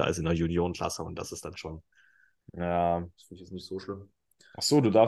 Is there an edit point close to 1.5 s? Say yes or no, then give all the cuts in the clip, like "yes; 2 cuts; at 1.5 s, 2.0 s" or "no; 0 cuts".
yes; 2 cuts; at 1.5 s, 3.1 s